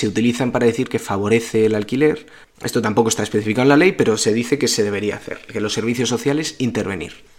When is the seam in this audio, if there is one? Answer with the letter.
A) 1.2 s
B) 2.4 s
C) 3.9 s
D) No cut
B